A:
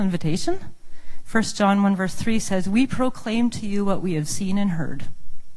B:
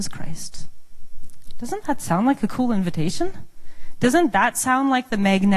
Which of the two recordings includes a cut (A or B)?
A